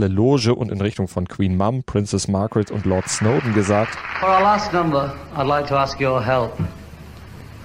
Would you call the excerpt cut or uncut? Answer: uncut